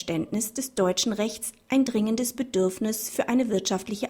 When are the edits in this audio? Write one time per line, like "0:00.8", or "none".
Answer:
none